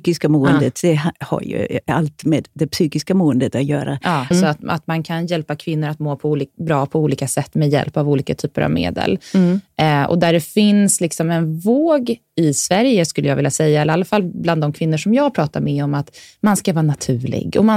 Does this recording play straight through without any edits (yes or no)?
no